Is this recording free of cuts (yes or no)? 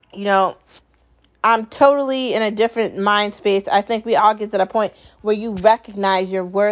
yes